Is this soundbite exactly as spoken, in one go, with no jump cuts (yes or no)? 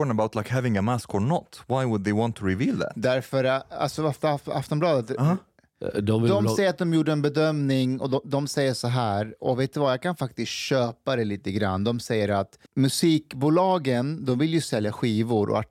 no